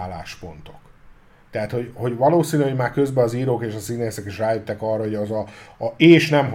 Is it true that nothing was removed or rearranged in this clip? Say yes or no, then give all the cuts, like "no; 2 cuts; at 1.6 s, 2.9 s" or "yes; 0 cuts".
yes; 0 cuts